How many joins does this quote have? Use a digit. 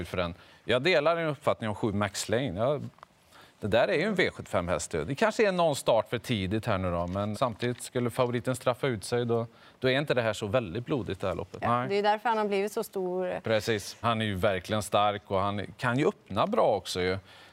3